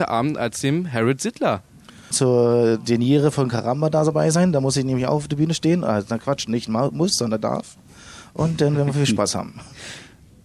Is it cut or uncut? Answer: cut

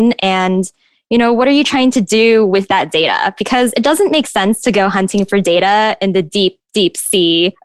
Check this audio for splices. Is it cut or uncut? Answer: uncut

